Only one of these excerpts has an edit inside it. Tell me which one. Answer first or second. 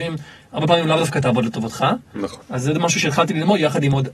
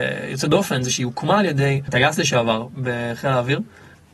first